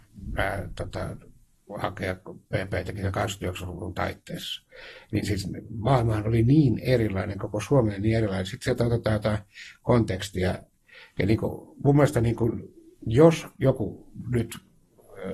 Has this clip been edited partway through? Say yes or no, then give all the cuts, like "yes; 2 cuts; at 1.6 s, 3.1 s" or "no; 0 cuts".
no; 0 cuts